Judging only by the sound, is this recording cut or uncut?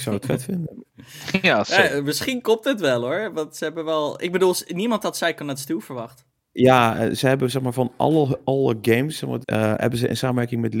cut